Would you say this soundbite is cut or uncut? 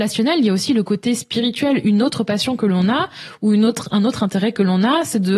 uncut